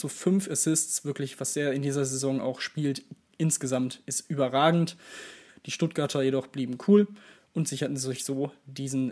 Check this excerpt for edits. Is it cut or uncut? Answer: cut